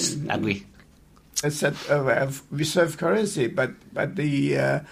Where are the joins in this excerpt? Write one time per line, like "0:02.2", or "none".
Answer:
0:01.4

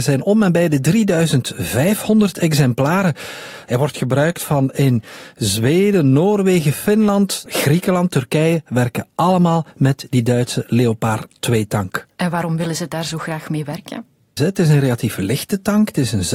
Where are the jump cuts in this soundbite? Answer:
0:14.4

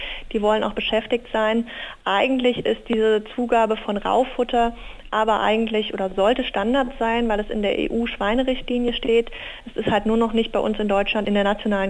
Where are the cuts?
none

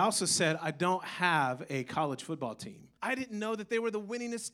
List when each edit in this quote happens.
0:03.0

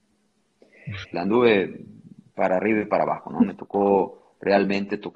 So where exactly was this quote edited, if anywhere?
0:01.1

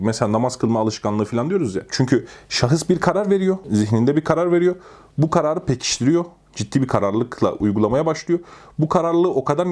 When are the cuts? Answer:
0:01.9

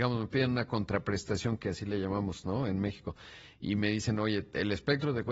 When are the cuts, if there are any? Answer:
none

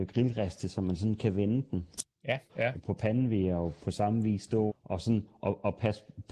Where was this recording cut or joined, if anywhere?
0:02.5
0:04.7

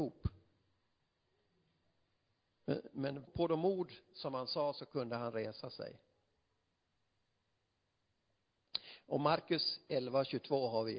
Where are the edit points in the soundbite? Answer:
0:03.3

